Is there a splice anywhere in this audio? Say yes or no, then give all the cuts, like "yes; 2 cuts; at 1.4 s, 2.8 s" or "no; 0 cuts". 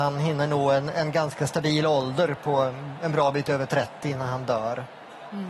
no; 0 cuts